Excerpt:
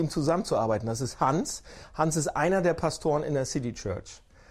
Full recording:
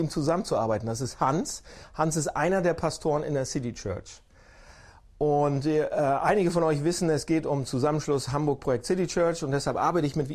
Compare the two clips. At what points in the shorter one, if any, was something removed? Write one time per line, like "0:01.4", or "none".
none